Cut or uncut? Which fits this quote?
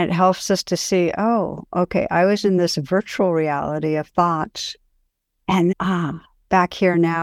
cut